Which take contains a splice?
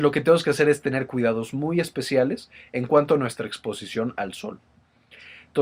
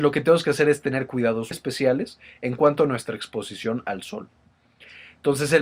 second; 1 cut; at 1.5 s

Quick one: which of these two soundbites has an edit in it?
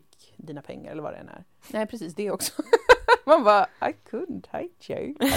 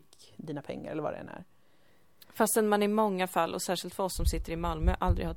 first; 1 cut; at 1.6 s

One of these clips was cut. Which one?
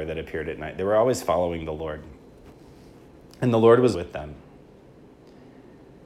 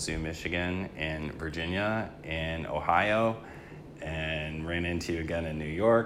first; 1 cut; at 3.9 s

